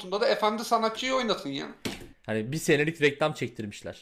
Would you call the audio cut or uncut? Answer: cut